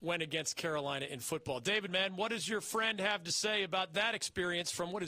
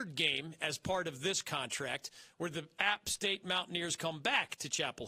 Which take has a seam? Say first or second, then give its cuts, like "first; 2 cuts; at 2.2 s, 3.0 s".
first; 1 cut; at 1.9 s